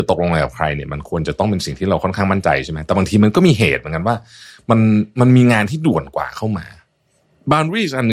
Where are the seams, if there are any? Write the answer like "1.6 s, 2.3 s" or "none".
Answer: none